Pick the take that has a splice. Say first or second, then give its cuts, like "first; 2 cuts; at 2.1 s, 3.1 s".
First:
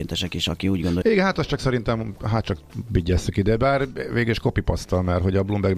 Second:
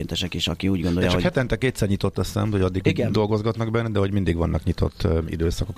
first; 1 cut; at 1.0 s